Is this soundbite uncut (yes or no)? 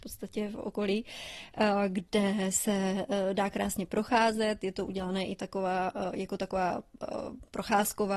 yes